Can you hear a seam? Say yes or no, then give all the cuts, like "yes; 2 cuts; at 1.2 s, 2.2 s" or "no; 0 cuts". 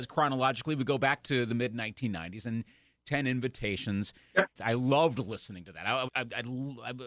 yes; 2 cuts; at 4.6 s, 6.1 s